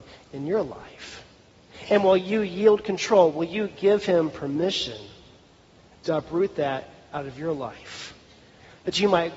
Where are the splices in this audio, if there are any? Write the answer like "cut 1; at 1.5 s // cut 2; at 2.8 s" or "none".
none